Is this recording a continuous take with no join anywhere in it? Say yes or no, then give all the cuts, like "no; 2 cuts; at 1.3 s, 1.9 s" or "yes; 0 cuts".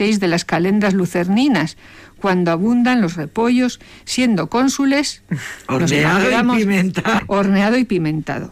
no; 1 cut; at 7.2 s